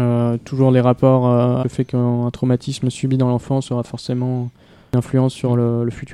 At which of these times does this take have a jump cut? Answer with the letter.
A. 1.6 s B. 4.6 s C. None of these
A